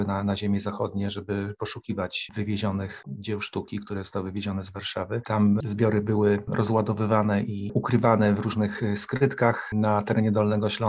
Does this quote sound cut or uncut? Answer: cut